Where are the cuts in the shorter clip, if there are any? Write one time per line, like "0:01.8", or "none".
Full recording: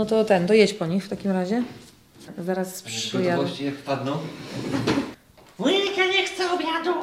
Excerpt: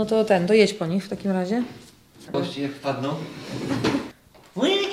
0:02.3

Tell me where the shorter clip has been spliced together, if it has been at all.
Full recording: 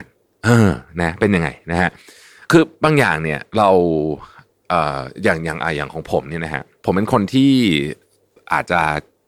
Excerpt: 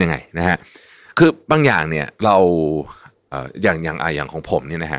0:03.3

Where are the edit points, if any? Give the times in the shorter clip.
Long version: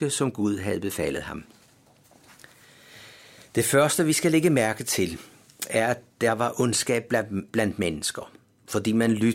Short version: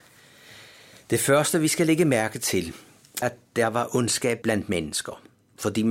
0:03.2
0:04.4

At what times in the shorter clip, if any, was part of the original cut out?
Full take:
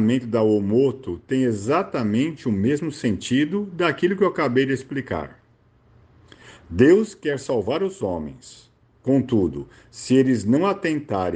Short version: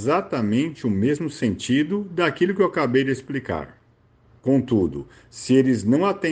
0:04.4

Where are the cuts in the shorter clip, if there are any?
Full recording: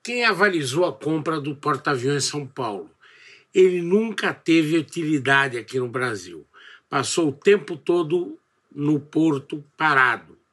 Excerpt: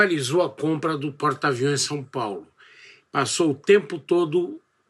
0:03.0

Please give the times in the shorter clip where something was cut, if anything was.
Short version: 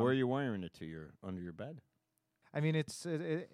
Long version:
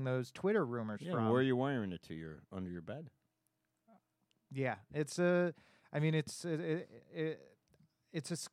0:02.4

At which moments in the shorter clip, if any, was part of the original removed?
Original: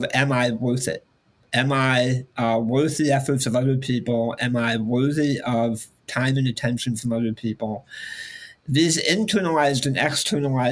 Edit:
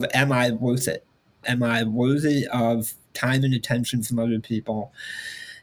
0:01.4

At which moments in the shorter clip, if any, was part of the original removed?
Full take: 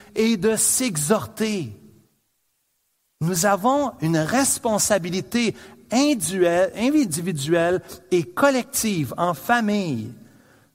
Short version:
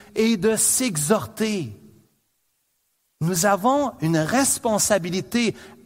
none

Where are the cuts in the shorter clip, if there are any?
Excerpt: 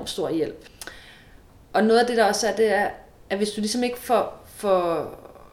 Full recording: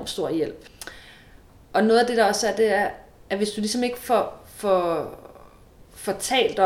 none

